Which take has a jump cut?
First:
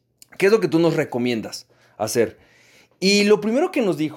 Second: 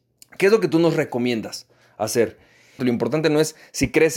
second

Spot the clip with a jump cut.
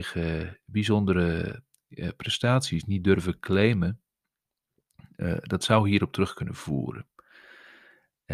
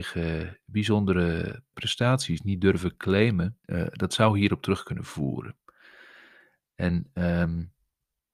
second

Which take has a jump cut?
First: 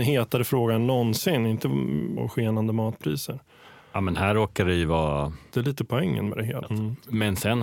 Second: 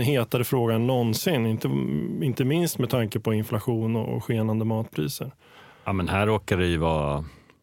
first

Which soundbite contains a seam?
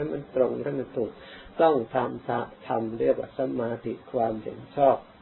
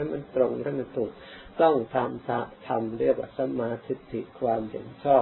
first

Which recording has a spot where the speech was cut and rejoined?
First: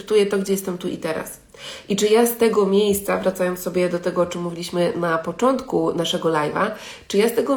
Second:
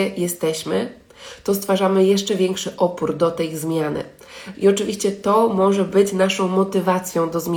second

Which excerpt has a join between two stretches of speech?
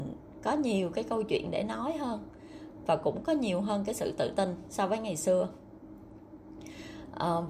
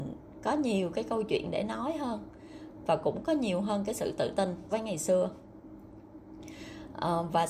second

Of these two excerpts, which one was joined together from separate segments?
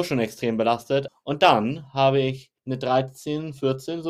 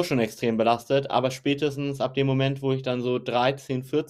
first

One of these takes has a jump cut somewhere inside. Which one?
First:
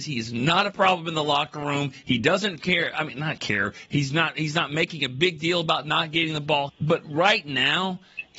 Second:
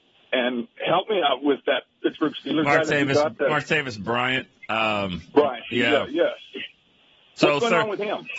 first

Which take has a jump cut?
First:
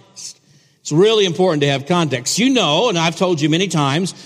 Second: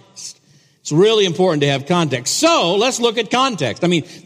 first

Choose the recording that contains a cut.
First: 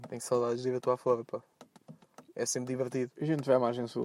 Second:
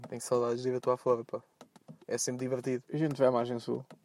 second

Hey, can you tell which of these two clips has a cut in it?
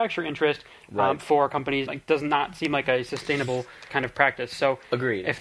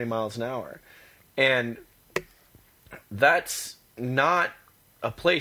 first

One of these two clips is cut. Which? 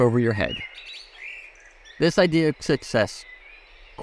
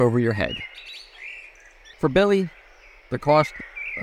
second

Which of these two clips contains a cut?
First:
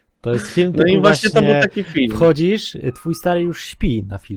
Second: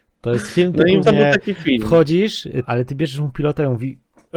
second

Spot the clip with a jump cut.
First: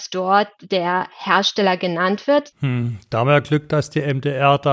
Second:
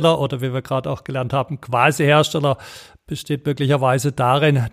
first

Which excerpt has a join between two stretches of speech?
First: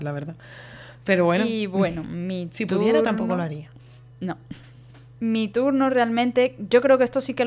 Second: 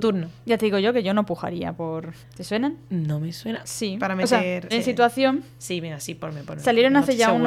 second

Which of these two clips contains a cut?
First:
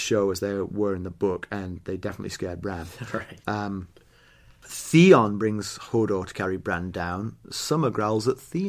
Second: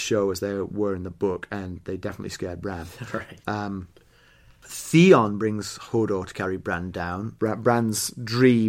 second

